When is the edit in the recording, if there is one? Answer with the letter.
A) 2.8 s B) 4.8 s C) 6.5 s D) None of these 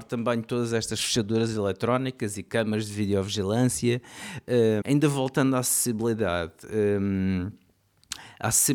B